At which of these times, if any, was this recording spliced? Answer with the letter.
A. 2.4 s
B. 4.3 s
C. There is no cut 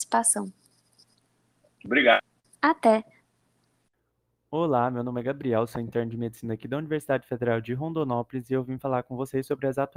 A